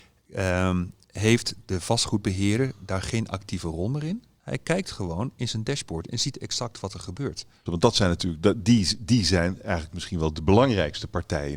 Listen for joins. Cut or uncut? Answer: cut